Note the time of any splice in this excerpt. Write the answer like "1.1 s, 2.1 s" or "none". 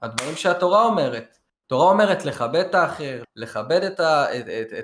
3.2 s